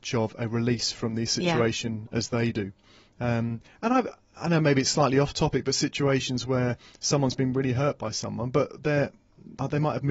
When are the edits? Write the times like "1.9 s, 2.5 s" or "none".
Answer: none